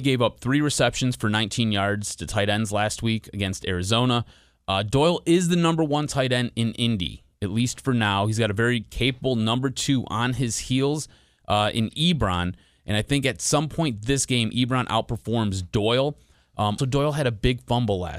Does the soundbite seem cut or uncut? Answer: cut